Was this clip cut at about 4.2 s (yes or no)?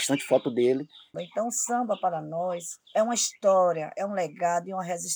no